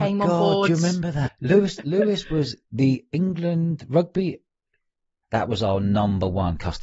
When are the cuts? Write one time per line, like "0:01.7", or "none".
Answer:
0:01.3
0:05.2